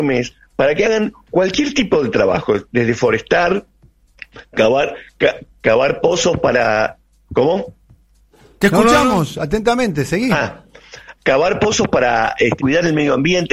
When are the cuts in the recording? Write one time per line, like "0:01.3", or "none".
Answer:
0:11.2
0:12.6